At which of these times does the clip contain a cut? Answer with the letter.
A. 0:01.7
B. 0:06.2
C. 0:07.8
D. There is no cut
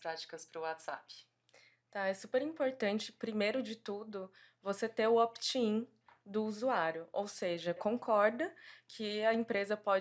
C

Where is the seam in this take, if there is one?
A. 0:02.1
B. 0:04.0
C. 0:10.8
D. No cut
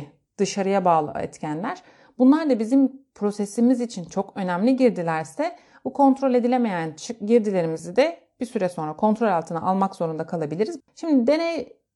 C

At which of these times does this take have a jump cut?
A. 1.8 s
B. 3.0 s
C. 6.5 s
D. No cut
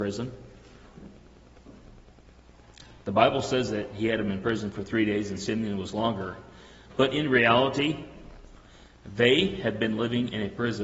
D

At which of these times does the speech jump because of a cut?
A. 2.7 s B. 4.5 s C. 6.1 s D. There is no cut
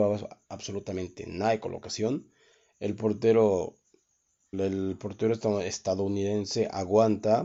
B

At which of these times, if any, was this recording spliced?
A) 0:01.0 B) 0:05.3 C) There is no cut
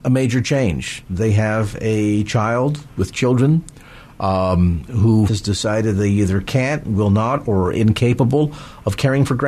B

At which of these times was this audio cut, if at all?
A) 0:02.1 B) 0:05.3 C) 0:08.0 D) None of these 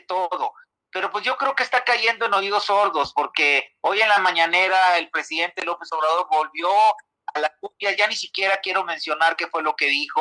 D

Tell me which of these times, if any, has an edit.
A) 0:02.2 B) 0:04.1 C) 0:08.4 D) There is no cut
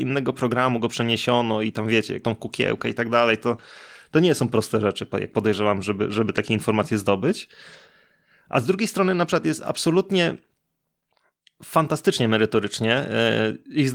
A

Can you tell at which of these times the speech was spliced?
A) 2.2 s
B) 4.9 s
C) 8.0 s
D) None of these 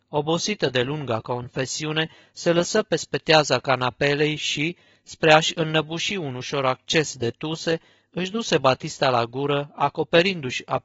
D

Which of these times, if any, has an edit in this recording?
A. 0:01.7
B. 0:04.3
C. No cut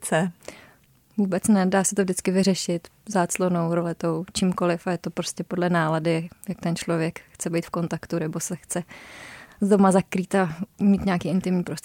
C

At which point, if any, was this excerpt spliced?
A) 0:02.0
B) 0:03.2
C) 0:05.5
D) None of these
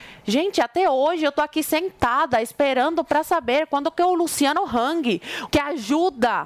C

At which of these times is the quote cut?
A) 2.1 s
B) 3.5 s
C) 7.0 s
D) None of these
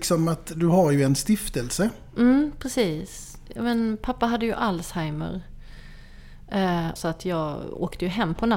C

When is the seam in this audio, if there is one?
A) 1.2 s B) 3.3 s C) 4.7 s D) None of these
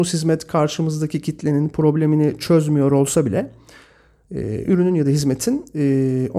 D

